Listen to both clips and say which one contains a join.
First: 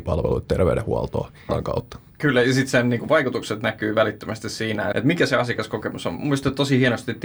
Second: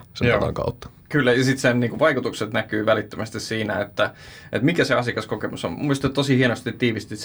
first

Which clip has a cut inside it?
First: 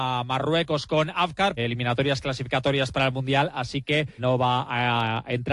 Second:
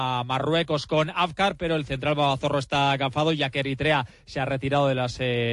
first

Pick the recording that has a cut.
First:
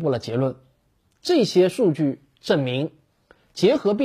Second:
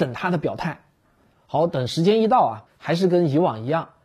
second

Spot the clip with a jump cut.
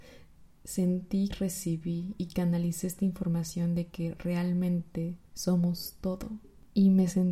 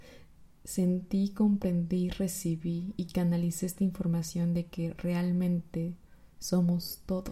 first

